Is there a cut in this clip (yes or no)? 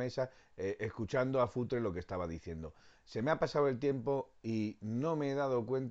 no